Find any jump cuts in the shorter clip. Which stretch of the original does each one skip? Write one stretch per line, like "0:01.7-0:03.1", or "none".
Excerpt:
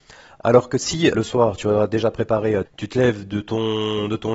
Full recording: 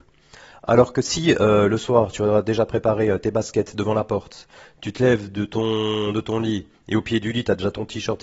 0:01.4-0:01.7
0:03.2-0:04.7

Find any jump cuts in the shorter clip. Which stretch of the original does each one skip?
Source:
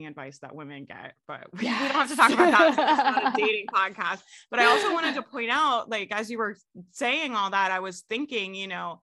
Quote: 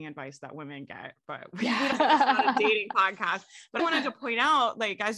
0:01.9-0:02.7
0:04.6-0:04.9

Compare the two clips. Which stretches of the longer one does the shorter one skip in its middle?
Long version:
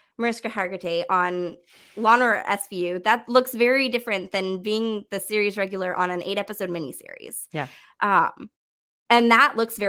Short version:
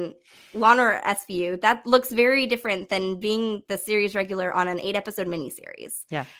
none

